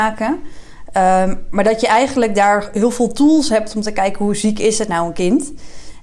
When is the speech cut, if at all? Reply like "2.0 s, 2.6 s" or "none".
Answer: none